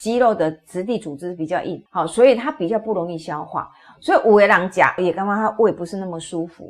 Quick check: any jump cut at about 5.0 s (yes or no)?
yes